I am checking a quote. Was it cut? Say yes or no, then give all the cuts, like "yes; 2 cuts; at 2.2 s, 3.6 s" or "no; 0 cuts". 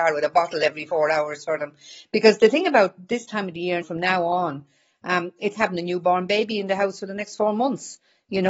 yes; 2 cuts; at 3.8 s, 5.5 s